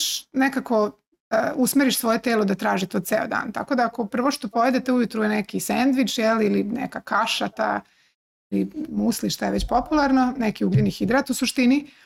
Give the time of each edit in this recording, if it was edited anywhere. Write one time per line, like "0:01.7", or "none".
none